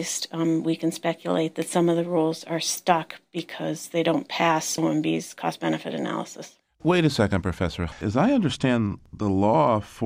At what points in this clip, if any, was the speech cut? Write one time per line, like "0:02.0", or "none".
none

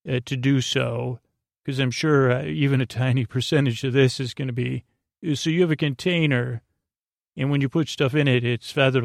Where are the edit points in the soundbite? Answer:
none

